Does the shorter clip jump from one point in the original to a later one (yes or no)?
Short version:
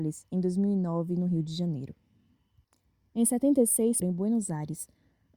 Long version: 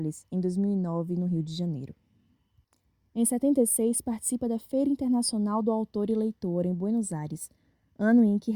yes